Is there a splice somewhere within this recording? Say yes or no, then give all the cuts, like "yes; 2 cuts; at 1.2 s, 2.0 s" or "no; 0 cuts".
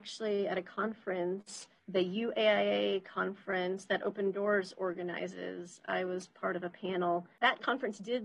no; 0 cuts